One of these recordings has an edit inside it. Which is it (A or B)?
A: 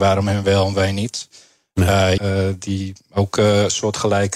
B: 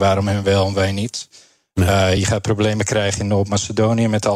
A